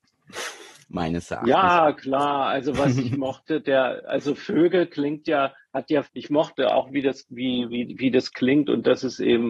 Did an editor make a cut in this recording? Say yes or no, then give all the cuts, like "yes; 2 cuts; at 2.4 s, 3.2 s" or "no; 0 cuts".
yes; 1 cut; at 6.1 s